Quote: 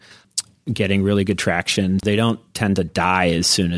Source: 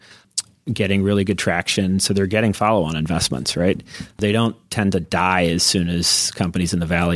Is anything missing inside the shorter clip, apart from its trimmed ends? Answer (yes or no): yes